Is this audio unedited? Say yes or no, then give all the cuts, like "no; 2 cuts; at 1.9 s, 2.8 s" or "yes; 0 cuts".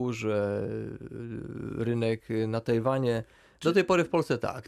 no; 1 cut; at 3.6 s